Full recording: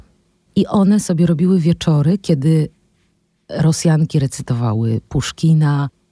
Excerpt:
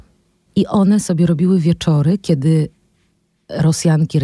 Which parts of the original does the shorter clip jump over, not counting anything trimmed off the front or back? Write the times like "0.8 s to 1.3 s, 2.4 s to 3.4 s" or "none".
none